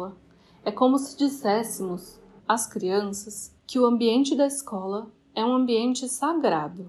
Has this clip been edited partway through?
yes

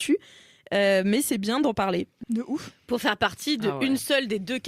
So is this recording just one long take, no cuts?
no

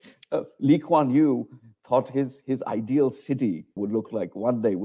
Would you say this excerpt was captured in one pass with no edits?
no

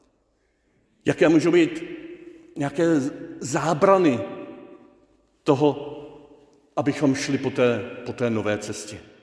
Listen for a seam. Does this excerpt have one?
no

